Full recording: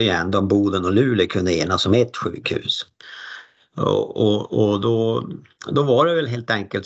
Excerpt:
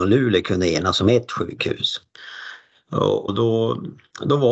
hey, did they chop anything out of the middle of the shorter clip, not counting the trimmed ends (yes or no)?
yes